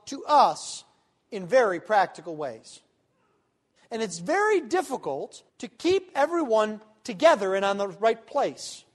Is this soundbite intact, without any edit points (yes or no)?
no